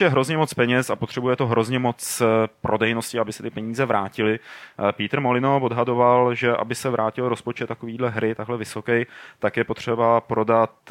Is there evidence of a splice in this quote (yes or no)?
no